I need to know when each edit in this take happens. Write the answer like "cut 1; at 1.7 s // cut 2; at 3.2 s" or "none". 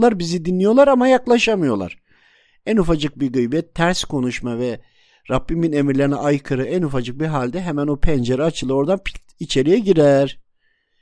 none